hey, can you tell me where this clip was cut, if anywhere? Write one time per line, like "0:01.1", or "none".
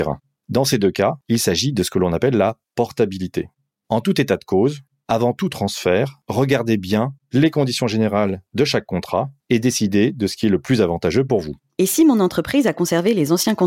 none